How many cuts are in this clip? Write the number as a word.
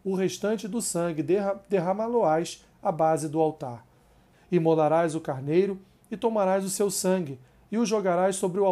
one